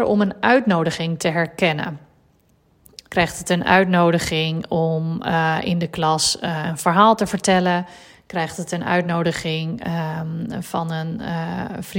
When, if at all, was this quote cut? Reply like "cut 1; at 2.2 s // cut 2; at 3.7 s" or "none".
cut 1; at 3.1 s